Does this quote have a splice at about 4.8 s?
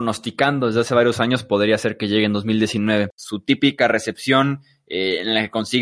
no; 1 cut; at 3.1 s

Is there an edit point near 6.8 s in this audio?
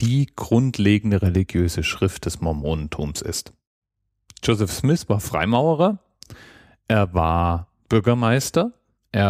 no; 0 cuts

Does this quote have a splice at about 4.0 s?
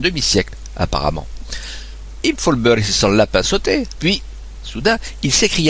yes; 2 cuts; at 2.2 s, 4.0 s

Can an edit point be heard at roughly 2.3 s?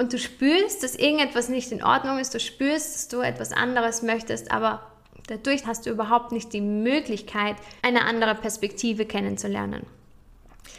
no; 2 cuts; at 5.6 s, 7.8 s

